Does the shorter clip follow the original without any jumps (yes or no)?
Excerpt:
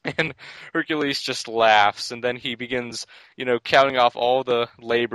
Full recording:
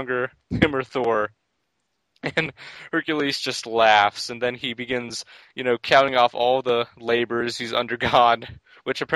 yes